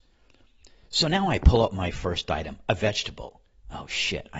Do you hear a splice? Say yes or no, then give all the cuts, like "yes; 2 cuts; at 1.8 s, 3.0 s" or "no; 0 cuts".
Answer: no; 0 cuts